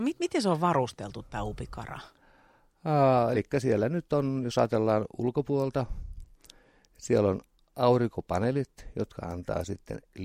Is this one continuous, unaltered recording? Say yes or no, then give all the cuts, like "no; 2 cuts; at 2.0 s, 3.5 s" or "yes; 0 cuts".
yes; 0 cuts